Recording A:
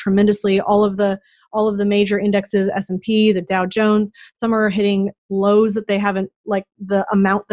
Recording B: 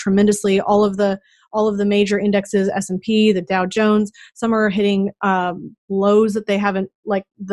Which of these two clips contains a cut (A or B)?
A